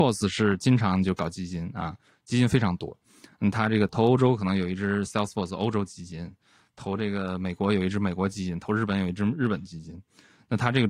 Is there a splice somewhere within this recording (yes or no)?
no